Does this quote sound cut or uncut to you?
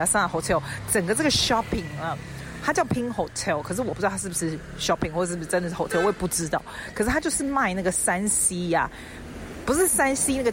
uncut